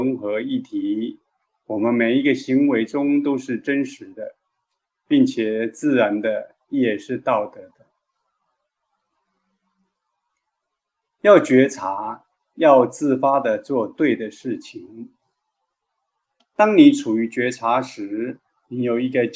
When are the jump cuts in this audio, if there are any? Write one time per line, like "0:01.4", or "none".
0:16.4